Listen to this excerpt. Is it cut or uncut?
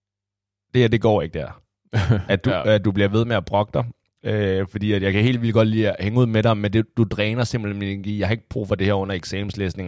uncut